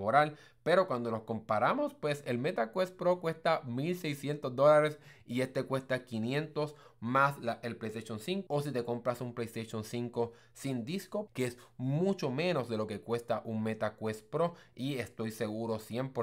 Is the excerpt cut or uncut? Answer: cut